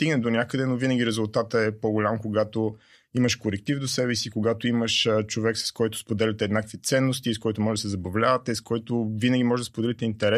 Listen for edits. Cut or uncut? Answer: uncut